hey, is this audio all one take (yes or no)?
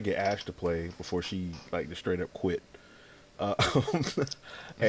yes